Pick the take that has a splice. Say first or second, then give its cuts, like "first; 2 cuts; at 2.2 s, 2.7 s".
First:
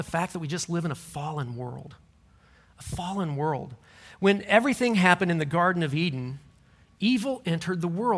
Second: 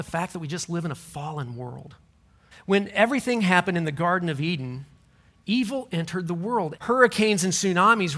second; 2 cuts; at 2.5 s, 6.8 s